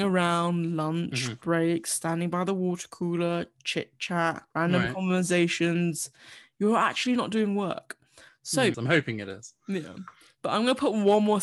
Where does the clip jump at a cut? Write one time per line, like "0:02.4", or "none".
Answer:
0:08.7